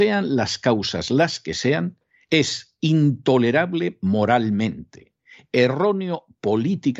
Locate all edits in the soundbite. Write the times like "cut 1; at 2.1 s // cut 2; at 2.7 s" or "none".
none